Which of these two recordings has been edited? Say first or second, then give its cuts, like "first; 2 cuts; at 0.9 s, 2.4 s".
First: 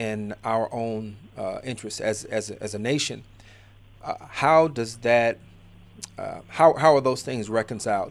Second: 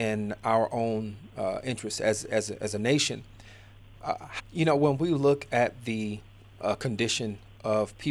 second; 1 cut; at 4.4 s